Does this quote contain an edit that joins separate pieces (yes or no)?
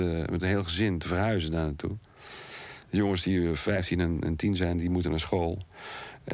no